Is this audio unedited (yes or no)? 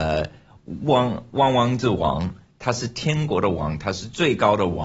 yes